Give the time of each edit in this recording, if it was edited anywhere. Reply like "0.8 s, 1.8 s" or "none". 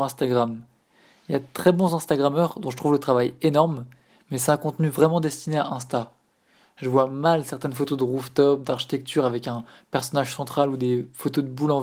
none